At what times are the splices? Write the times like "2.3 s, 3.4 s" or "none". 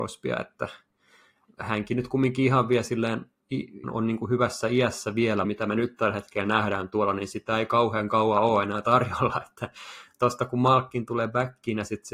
3.8 s, 5.4 s